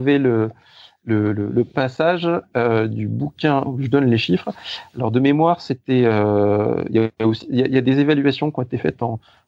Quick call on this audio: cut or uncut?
uncut